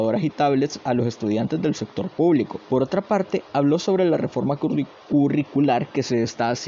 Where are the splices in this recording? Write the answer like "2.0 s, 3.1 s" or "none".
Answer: 2.6 s